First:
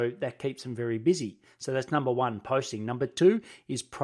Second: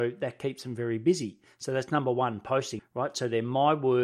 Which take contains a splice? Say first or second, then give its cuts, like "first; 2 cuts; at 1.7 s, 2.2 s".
second; 1 cut; at 2.8 s